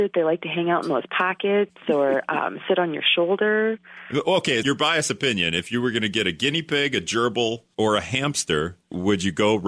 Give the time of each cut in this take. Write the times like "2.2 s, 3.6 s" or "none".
4.6 s, 7.7 s

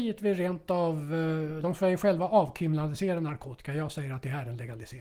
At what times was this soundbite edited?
1.6 s

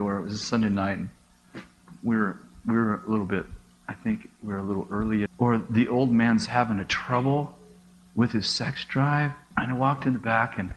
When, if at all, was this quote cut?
5.3 s, 9.5 s

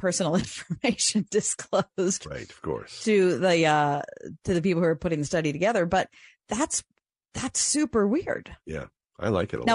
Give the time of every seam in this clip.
none

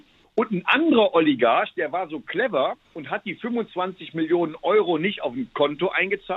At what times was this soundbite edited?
2.8 s

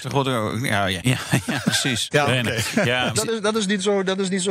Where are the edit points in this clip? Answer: 1.0 s, 2.1 s, 3.1 s

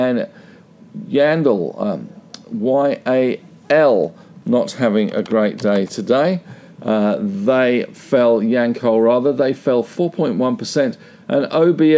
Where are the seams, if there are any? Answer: none

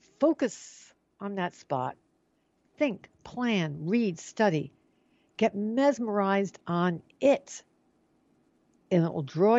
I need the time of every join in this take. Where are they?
none

